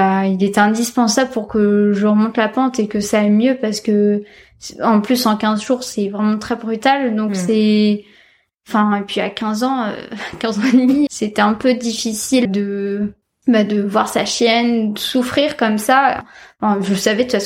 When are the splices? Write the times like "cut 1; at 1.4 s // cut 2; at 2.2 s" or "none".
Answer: cut 1; at 11.1 s // cut 2; at 12.4 s

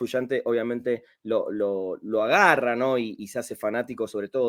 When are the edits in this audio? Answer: none

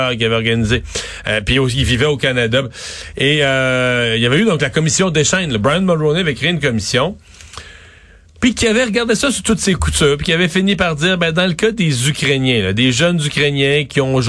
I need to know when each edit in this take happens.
none

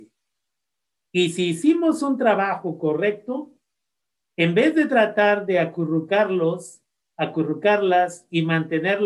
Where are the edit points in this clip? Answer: cut 1; at 1.0 s

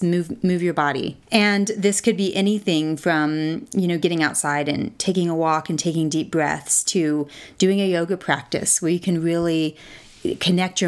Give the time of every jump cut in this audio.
cut 1; at 1.2 s

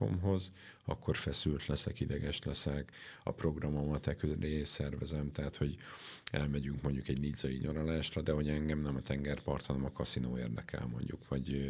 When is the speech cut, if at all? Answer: none

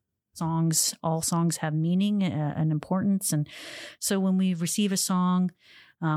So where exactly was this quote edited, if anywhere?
none

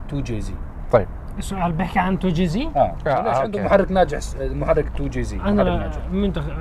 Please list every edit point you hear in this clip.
none

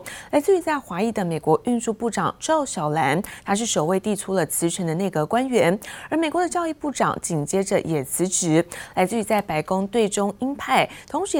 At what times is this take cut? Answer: none

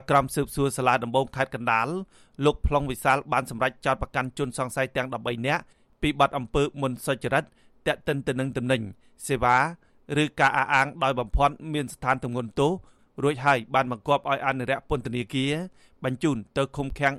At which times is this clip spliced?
none

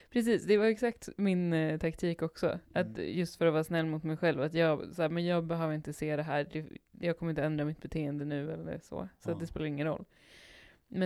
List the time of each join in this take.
none

